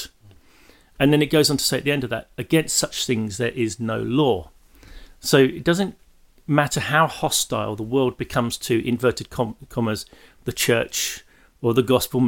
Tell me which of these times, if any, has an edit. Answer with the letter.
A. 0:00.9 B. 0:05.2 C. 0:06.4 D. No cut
D